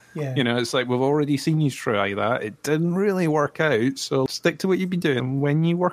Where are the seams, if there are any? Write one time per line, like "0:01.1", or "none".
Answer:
none